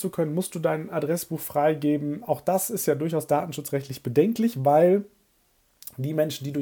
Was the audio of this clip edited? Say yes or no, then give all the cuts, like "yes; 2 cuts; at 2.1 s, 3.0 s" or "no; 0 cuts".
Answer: no; 0 cuts